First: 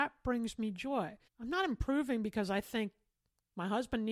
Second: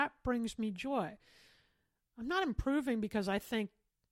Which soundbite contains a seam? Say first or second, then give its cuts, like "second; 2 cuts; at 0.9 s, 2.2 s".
first; 1 cut; at 1.3 s